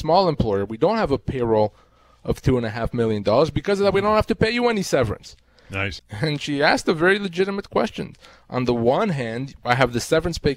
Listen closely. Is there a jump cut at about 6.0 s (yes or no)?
yes